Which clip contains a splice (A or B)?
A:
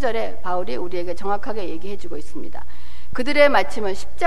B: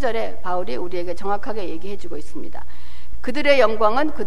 B